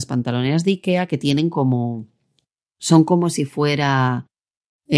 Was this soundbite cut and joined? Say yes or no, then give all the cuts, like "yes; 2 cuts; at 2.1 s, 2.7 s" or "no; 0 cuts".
no; 0 cuts